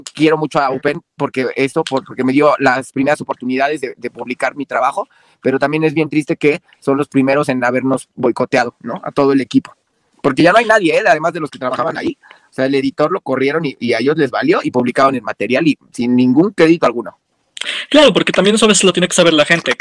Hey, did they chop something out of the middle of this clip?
no; 0 cuts

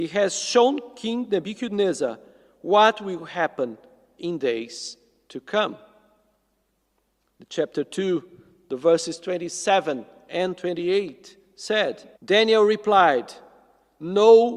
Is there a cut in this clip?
yes; 2 cuts; at 7.3 s, 12.2 s

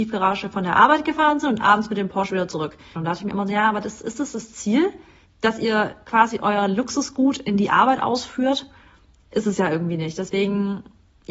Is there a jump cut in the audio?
yes; 2 cuts; at 2.9 s, 5.2 s

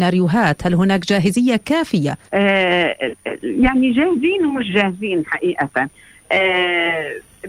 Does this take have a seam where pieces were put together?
yes; 1 cut; at 2.3 s

